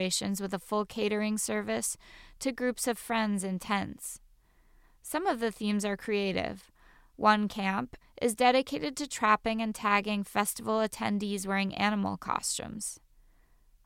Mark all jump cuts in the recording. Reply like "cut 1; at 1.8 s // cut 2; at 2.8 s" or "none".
cut 1; at 8.0 s